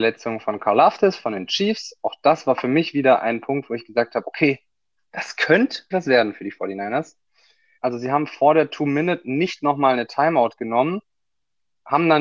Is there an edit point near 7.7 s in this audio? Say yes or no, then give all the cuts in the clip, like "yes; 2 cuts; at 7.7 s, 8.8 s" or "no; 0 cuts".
yes; 2 cuts; at 5.9 s, 7.7 s